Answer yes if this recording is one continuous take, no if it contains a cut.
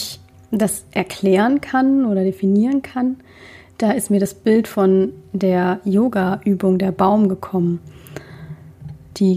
yes